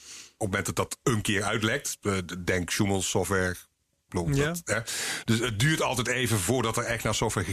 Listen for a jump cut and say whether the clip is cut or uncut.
uncut